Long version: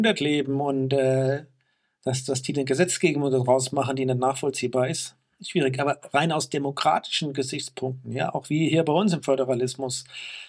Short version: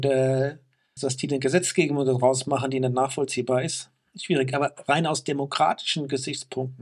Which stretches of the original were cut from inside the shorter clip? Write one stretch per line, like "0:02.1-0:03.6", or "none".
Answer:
0:01.8-0:02.2